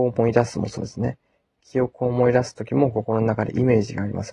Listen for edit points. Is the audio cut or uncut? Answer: uncut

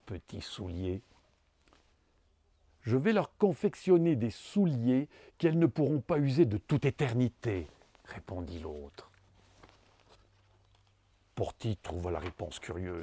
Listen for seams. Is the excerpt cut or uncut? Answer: uncut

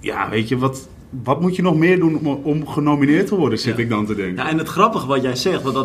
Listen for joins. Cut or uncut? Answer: uncut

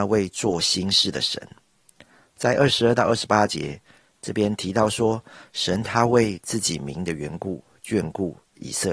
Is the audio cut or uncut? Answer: uncut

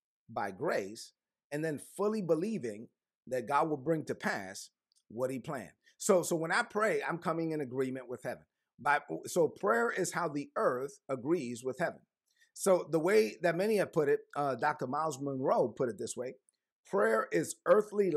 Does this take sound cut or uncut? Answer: uncut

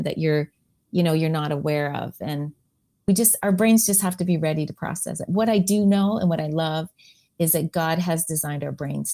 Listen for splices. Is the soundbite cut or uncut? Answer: uncut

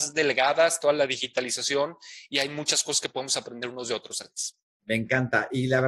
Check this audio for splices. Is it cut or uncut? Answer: uncut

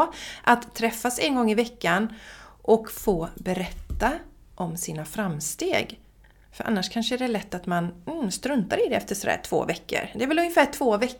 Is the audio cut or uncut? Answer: uncut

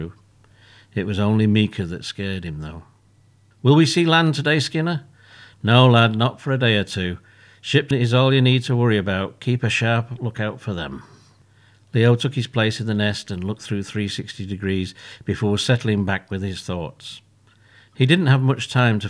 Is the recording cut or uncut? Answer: uncut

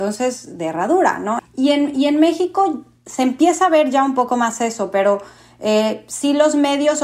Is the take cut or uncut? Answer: cut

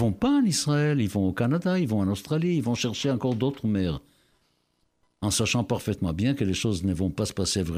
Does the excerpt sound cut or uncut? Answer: uncut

